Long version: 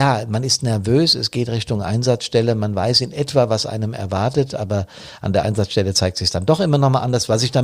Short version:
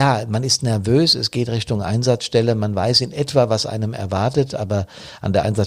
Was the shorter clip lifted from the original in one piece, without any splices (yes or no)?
yes